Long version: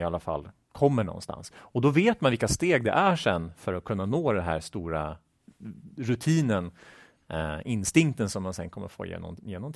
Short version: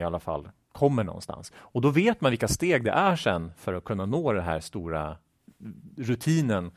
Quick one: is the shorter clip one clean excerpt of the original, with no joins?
yes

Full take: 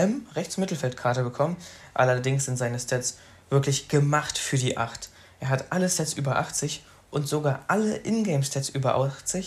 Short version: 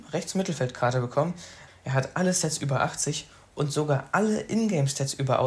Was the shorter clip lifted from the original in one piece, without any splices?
no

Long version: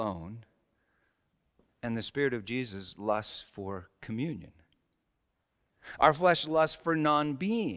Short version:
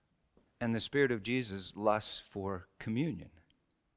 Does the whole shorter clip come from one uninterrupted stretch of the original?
yes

